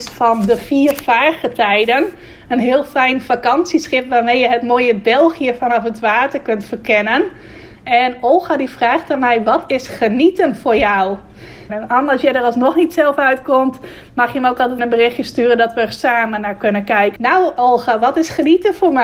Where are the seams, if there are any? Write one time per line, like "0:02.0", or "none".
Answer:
0:11.7
0:14.8
0:17.2